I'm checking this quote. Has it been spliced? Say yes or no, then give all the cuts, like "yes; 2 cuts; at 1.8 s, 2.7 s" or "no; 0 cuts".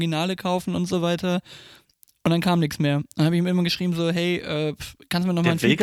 no; 0 cuts